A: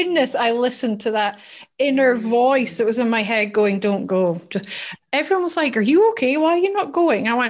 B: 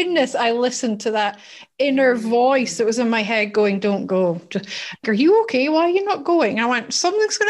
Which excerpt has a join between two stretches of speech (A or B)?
B